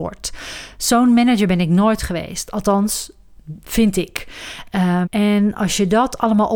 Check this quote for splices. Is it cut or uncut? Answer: cut